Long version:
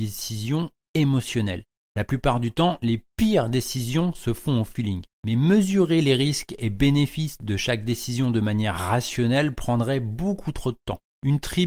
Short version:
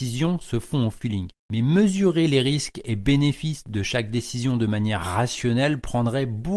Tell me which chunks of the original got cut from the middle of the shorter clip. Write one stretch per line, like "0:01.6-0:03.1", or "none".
none

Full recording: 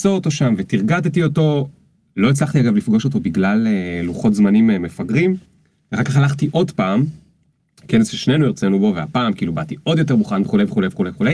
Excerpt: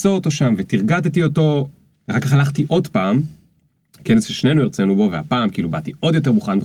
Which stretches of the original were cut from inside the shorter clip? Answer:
0:01.9-0:05.8

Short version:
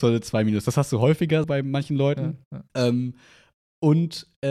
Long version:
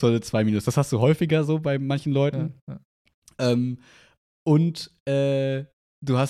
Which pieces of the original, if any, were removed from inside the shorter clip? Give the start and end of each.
0:01.4-0:01.6
0:02.9-0:03.3

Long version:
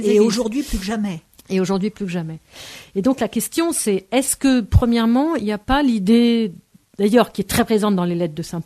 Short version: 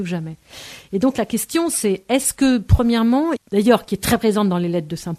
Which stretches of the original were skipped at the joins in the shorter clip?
0:05.4-0:06.8

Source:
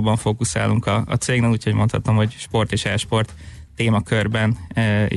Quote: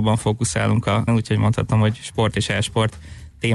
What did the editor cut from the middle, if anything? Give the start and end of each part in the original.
0:01.1-0:01.4

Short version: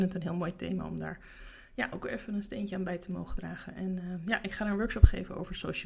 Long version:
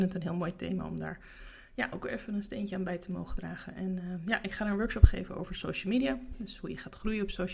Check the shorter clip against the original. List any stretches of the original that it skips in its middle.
none

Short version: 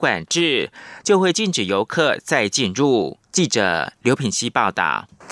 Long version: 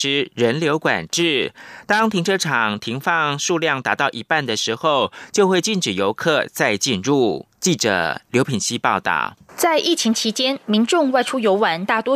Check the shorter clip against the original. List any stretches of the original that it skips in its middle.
0:01.8-0:05.3

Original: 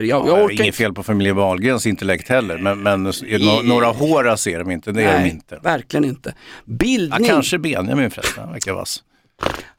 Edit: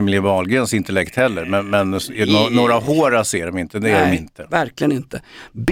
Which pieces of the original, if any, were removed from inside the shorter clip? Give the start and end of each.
none

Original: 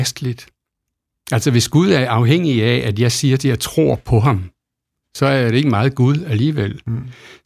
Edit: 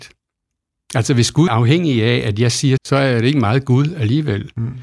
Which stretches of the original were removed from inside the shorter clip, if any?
0:01.8-0:02.1
0:03.4-0:05.1

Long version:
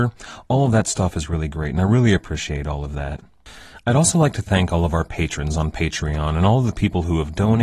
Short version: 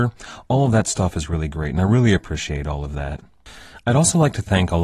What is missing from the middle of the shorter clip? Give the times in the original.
none

